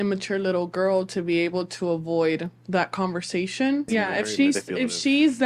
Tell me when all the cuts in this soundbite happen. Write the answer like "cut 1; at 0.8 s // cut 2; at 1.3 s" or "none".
cut 1; at 3.9 s